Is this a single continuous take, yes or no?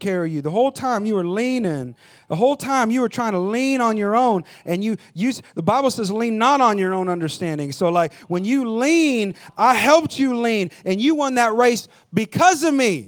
yes